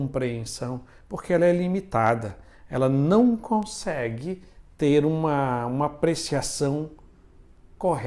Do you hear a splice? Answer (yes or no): no